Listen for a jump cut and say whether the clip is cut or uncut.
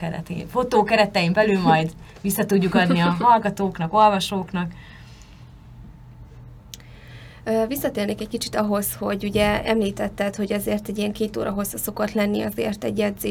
uncut